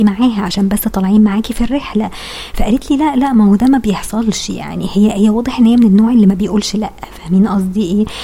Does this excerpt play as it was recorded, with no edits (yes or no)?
yes